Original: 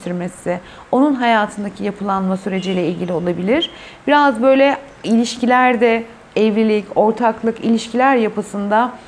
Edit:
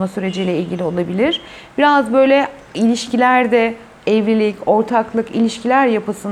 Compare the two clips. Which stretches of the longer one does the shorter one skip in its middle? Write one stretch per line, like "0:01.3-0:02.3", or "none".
none

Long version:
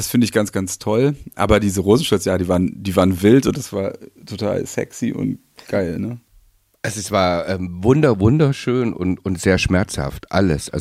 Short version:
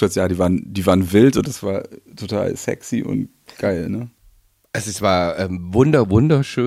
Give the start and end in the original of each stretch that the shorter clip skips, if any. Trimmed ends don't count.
none

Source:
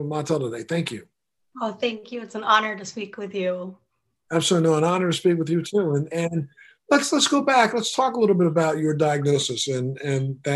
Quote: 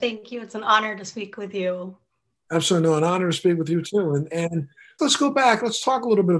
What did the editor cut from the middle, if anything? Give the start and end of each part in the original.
0:06.8-0:07.1

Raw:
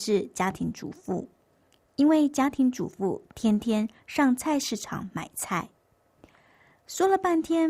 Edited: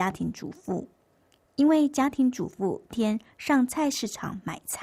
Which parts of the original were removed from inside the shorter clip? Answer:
0:03.3-0:03.6

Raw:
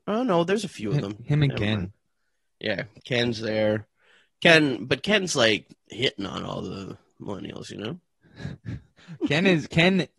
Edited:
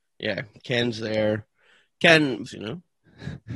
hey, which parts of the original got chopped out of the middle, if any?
0:04.9-0:07.6

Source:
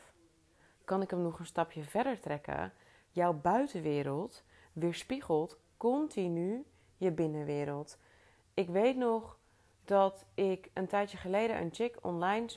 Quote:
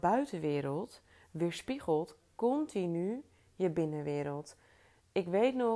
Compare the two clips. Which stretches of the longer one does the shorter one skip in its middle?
none

